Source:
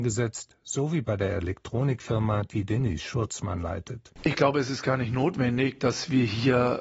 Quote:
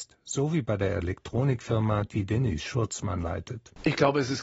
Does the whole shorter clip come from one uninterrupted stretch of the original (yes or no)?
yes